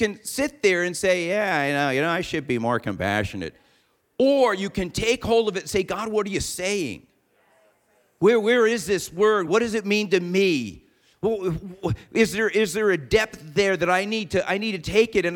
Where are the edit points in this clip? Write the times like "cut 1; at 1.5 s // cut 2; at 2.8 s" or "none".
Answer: cut 1; at 9.5 s